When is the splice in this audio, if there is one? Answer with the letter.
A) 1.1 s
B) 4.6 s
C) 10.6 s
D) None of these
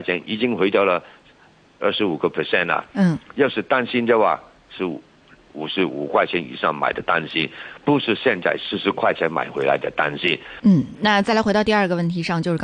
C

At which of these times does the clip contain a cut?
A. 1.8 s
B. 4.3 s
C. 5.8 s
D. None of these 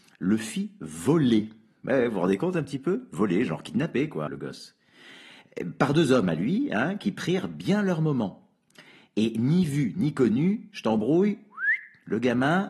B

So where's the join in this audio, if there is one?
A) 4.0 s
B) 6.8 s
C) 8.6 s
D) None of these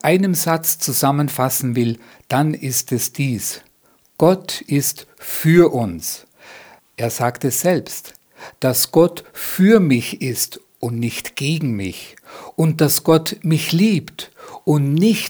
B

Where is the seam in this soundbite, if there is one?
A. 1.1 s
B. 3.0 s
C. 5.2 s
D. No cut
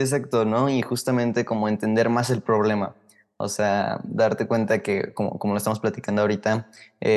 D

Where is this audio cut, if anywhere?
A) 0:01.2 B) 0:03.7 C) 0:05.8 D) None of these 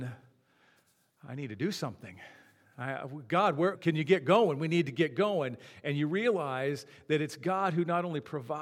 B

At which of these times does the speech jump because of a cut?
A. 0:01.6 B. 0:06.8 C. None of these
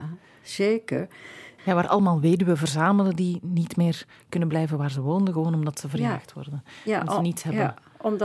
A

